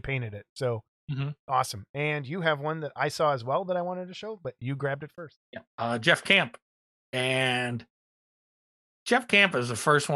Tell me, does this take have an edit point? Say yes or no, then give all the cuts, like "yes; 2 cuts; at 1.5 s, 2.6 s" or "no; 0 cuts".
yes; 1 cut; at 5.4 s